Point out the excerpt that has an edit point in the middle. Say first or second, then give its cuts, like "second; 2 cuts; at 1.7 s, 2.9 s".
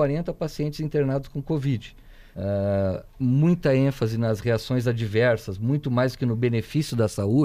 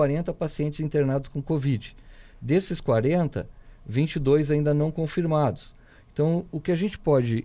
first; 1 cut; at 2.3 s